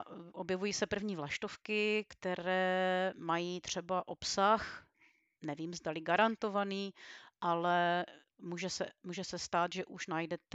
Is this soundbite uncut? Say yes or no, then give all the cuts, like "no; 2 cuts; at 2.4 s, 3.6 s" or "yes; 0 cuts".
yes; 0 cuts